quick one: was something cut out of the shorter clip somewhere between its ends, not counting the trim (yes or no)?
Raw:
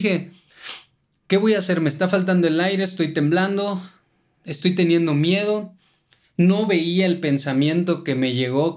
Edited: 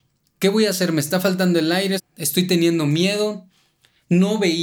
yes